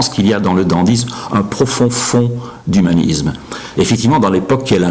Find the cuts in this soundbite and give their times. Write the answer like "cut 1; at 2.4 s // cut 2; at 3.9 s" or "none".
cut 1; at 3.7 s